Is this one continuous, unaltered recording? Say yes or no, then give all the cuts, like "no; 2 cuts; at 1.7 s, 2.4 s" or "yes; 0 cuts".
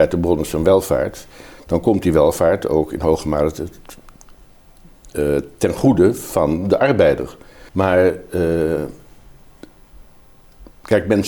no; 1 cut; at 7.7 s